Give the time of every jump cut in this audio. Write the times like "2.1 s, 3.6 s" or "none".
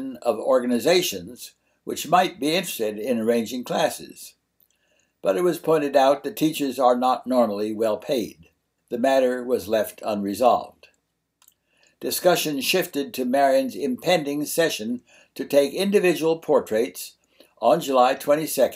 none